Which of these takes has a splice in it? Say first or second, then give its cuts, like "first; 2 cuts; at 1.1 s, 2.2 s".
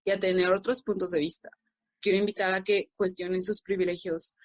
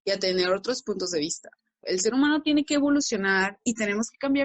second; 1 cut; at 1.8 s